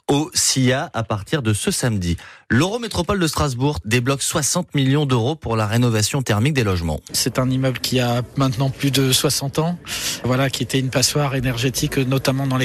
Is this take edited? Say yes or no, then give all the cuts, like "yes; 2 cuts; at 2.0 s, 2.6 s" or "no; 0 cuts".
yes; 2 cuts; at 3.8 s, 7.1 s